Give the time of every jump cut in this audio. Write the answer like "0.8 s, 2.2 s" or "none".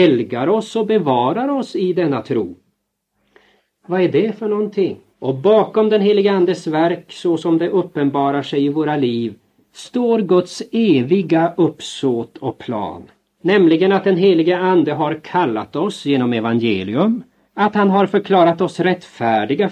5.1 s, 13.4 s, 17.5 s